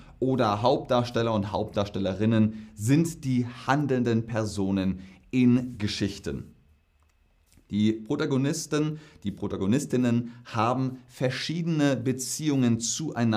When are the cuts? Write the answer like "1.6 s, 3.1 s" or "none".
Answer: none